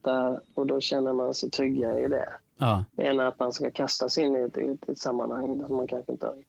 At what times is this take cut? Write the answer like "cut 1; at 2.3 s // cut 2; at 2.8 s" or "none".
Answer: cut 1; at 2.9 s